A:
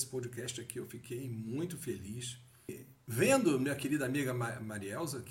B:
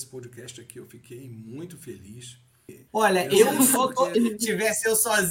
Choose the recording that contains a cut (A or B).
B